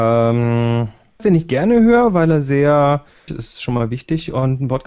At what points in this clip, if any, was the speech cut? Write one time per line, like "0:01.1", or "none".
0:01.2
0:03.3